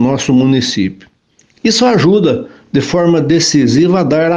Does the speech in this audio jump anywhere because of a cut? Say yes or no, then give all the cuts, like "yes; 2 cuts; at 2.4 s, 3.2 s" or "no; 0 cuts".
no; 0 cuts